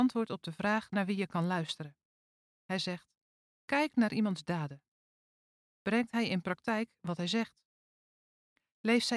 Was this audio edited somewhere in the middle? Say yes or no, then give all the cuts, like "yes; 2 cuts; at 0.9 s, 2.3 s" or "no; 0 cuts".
no; 0 cuts